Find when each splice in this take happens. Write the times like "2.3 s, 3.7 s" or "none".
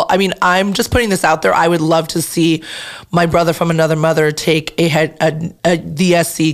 5.6 s